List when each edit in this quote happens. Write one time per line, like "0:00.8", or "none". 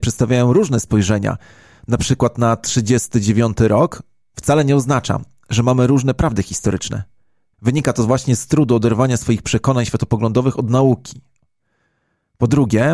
0:07.5